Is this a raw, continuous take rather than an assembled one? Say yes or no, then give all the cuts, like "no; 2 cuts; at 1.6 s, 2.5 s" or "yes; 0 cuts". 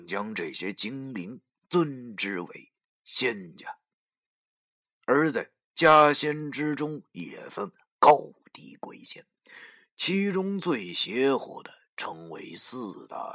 yes; 0 cuts